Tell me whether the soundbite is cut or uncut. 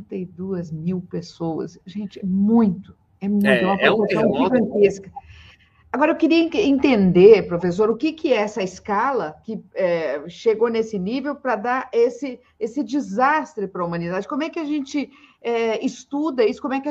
cut